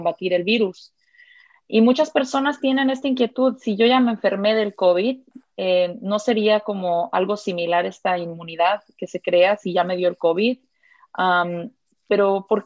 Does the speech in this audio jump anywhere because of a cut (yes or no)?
no